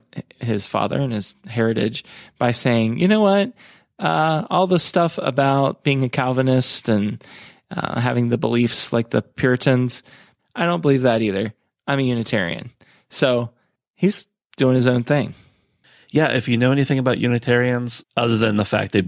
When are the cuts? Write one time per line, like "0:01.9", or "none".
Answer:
0:10.4
0:18.0